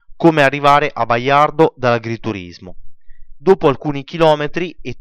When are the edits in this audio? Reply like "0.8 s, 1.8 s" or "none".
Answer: 3.4 s